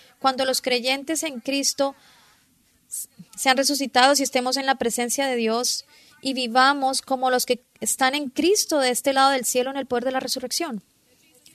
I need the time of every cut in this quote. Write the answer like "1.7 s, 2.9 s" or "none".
3.3 s